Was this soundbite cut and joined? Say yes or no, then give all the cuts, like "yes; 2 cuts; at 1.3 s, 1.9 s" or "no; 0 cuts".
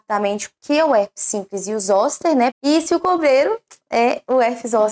yes; 1 cut; at 2.5 s